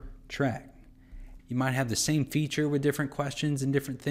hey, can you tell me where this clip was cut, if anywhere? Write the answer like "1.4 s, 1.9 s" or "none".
1.4 s